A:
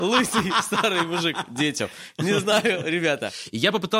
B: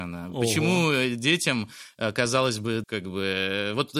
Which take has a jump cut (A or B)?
B